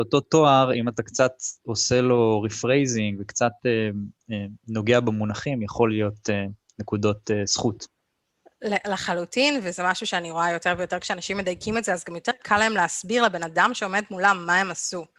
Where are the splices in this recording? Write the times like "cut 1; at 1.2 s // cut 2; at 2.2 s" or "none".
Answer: none